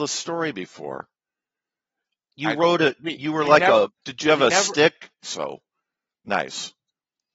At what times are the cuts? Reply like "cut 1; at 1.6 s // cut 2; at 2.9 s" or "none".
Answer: cut 1; at 4.0 s // cut 2; at 5.2 s